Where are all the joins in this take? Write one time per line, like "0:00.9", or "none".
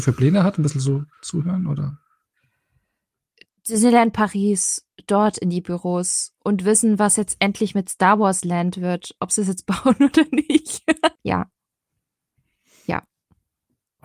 0:01.1
0:11.2